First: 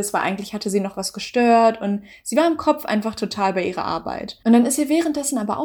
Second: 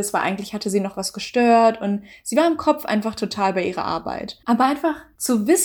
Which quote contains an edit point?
second; 1 cut; at 4.4 s

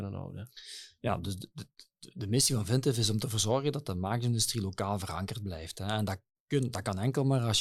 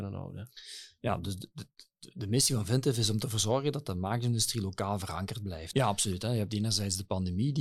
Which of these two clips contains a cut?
second; 1 cut; at 5.7 s

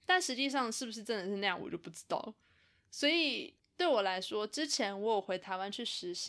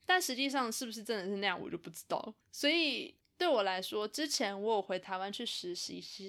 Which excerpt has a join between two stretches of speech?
second; 1 cut; at 2.4 s

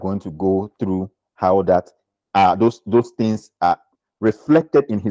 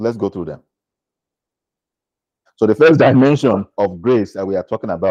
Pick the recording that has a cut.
second; 2 cuts; at 2.5 s, 3.7 s

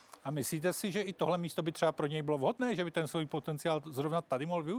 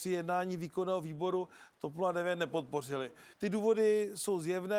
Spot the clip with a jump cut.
second; 1 cut; at 3.3 s

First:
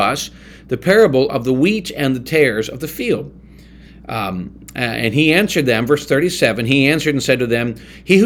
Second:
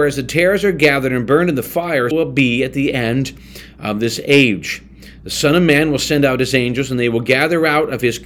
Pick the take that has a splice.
second; 1 cut; at 2.1 s

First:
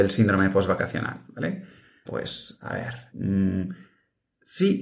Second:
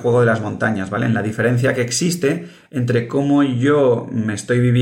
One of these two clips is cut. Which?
first; 2 cuts; at 2.1 s, 3.1 s

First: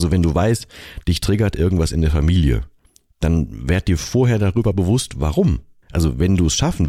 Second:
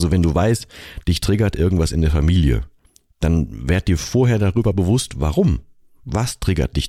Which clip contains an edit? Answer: first; 1 cut; at 5.8 s

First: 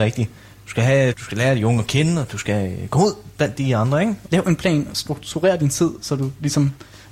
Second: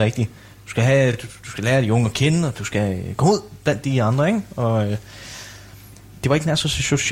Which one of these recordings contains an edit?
first; 2 cuts; at 1.1 s, 4.3 s

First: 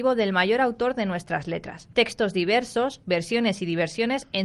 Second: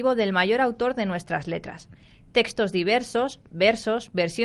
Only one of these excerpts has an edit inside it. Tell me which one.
first; 2 cuts; at 1.9 s, 3.0 s

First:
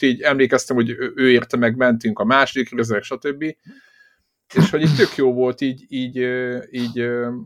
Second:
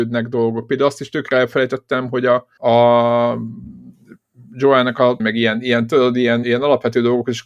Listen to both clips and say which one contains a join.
second; 3 cuts; at 2.6 s, 5.2 s, 6.4 s

